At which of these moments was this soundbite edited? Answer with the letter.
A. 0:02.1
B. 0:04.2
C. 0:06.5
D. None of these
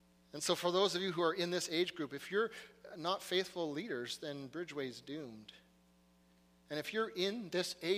D